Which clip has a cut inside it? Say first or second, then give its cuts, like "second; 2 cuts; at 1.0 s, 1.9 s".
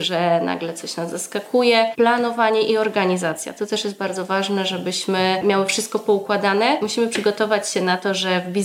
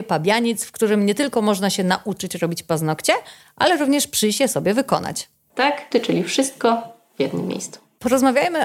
second; 1 cut; at 5.9 s